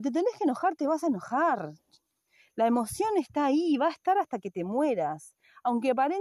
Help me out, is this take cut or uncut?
uncut